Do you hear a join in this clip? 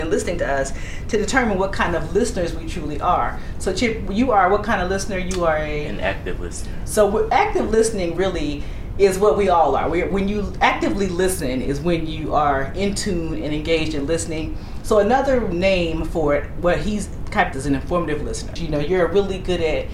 yes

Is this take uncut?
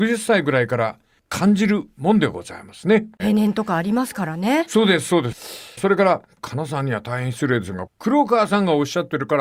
no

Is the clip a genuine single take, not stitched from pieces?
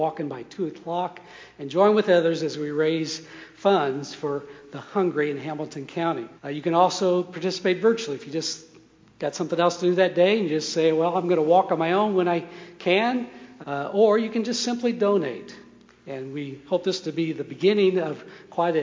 no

